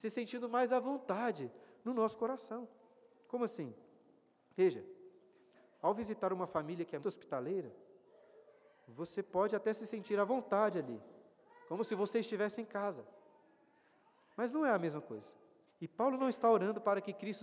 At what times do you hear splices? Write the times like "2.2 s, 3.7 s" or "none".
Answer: 7.0 s, 15.7 s